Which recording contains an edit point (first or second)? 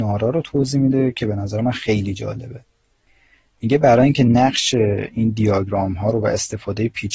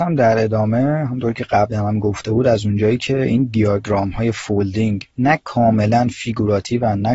second